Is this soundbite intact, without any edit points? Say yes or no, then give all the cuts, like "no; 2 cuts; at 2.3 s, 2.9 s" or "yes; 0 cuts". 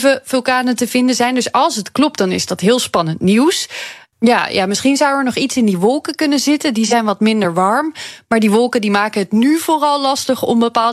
no; 1 cut; at 4.1 s